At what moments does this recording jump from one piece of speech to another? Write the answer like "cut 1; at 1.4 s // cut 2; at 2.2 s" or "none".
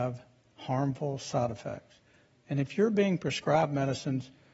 none